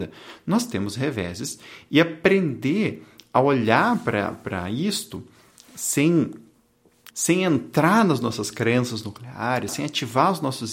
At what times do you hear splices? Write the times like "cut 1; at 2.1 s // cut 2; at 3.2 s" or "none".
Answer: cut 1; at 7.1 s // cut 2; at 9.7 s